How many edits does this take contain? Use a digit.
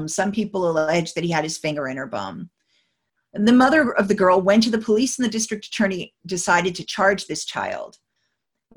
0